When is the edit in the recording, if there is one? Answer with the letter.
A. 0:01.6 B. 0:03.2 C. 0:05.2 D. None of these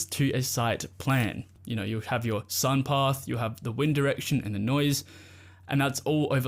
A